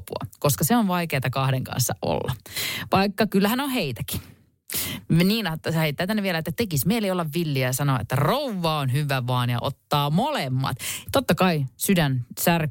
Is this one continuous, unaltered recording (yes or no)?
no